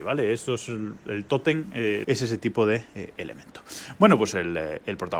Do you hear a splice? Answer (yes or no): yes